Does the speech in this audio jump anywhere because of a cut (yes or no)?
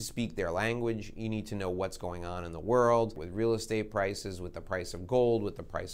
yes